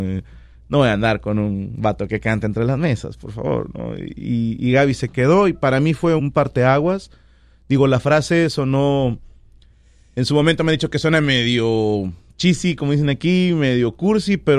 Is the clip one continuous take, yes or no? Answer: no